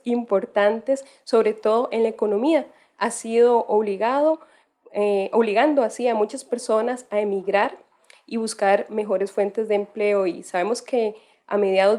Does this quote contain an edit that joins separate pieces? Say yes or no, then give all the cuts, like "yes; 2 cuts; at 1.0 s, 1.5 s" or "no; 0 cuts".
no; 0 cuts